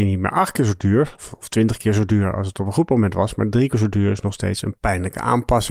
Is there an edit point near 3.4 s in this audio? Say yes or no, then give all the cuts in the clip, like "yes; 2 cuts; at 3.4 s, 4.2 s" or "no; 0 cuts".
no; 1 cut; at 1.2 s